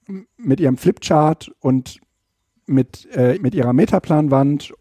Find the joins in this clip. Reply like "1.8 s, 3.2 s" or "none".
3.4 s